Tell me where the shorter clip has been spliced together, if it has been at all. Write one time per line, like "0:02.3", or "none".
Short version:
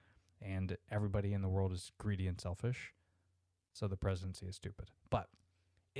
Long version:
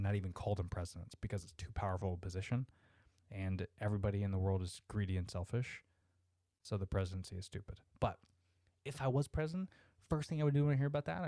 none